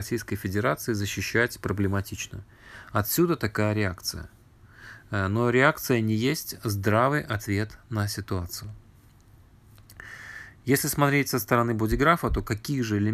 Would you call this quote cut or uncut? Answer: uncut